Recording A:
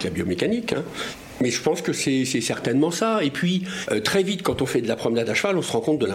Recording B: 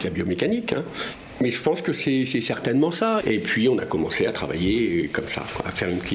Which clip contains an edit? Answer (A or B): B